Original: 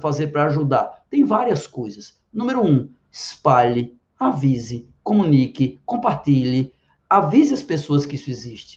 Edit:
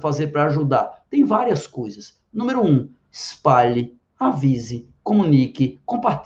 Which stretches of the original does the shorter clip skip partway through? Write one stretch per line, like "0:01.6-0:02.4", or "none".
none